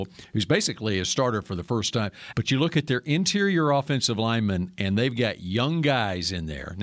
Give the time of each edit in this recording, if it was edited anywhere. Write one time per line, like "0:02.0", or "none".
0:02.3